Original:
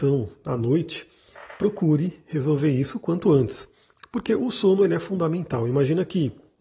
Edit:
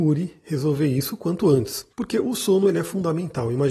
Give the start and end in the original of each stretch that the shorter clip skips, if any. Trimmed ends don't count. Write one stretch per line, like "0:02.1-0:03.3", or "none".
0:03.7-0:04.1